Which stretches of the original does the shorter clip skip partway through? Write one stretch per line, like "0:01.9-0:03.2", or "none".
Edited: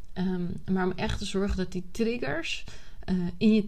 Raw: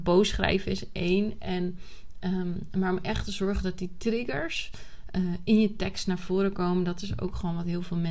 none